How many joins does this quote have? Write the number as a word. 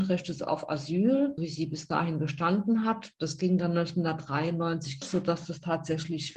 two